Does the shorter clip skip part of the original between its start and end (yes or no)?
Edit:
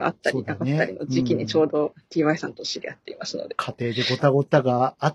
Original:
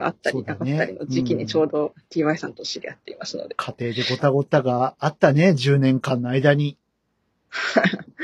no